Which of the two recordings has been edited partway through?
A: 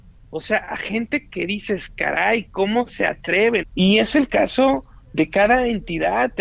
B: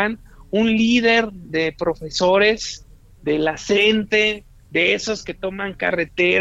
A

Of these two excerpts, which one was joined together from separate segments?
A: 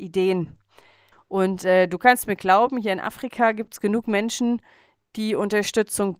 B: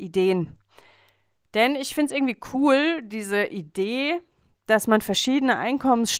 A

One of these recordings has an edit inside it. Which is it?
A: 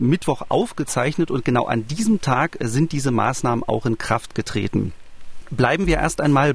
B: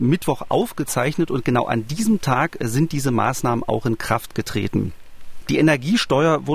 B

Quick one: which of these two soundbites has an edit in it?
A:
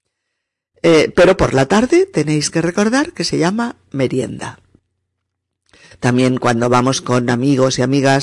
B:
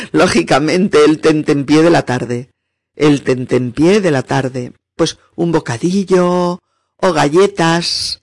B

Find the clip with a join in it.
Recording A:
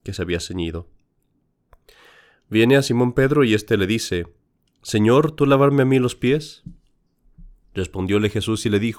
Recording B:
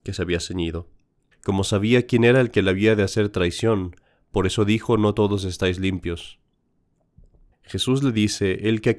B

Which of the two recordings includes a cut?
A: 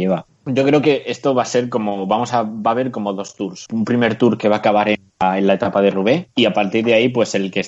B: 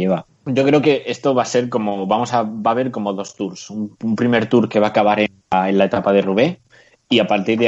A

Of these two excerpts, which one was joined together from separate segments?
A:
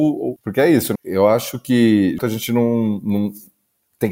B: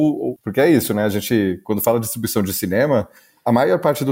A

